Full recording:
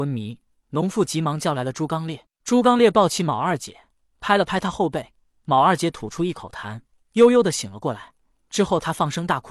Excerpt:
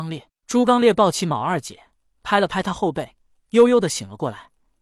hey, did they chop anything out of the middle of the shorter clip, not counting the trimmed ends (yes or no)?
yes